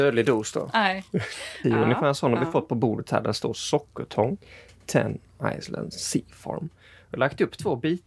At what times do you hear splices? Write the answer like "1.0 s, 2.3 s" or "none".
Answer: 1.6 s